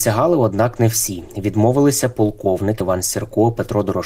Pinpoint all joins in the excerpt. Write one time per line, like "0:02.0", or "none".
0:02.8